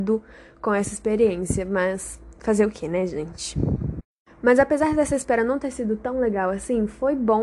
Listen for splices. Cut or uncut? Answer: uncut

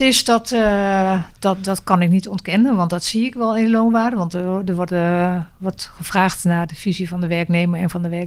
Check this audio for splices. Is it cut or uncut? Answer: uncut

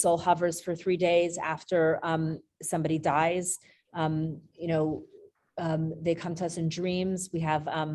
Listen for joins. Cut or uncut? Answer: uncut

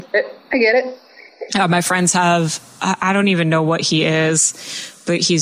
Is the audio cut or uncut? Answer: uncut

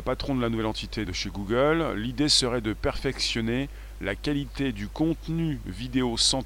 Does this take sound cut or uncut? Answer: cut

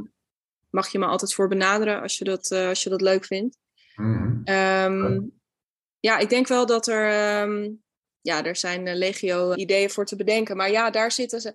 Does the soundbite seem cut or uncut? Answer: cut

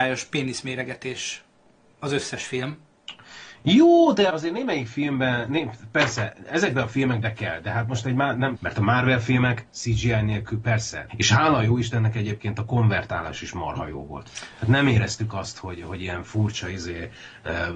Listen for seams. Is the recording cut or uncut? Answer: cut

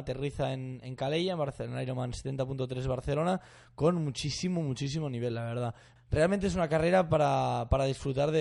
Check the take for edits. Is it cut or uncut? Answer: cut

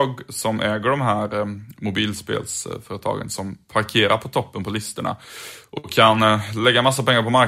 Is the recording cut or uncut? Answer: uncut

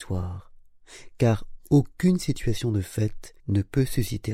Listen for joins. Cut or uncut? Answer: cut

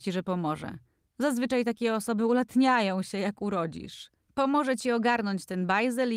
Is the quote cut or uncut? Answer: cut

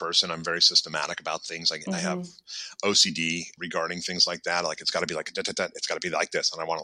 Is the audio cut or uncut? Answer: cut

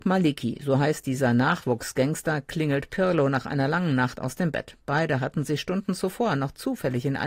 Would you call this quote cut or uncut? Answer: uncut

